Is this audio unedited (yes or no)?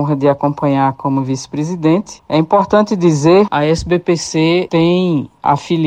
no